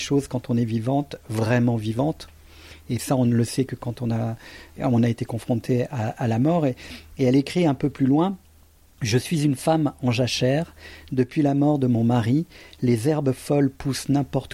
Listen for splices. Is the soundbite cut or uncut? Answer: uncut